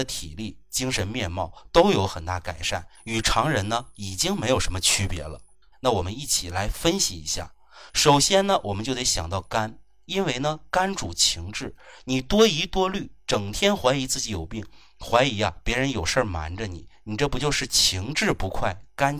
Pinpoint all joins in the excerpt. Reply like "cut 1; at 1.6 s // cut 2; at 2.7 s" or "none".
cut 1; at 5.7 s // cut 2; at 7.9 s